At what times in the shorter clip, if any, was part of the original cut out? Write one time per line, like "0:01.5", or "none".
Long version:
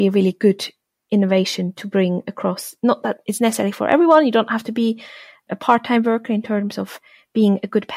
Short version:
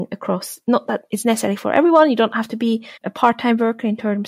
0:03.0